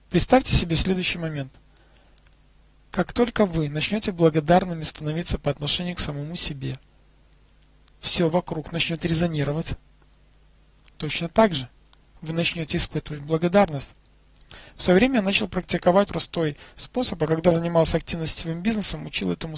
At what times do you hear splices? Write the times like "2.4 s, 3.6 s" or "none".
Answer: 16.1 s